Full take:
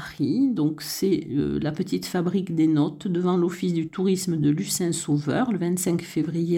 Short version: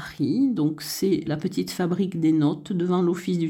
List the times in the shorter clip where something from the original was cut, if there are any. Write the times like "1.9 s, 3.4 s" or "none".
1.3 s